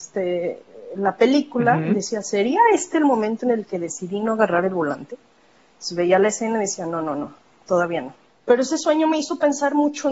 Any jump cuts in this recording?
yes; 1 cut; at 8.3 s

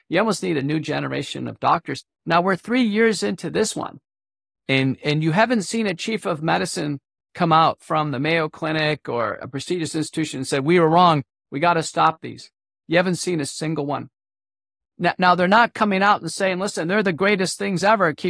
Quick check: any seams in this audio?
no; 0 cuts

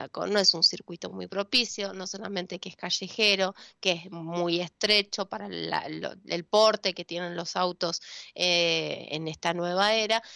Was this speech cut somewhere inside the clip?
no; 0 cuts

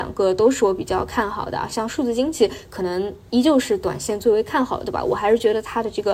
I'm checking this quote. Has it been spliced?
no; 0 cuts

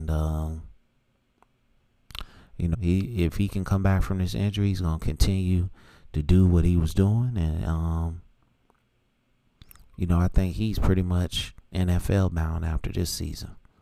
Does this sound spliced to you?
yes; 1 cut; at 2.7 s

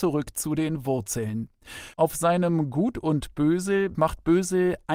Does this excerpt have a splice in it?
yes; 2 cuts; at 1.9 s, 3.9 s

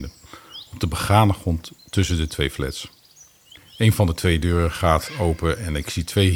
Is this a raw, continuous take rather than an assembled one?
no; 1 cut; at 3.6 s

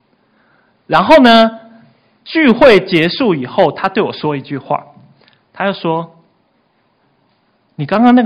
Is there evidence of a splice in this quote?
no; 0 cuts

